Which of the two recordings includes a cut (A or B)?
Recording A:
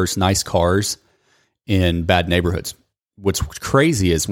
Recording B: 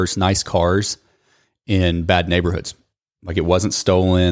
B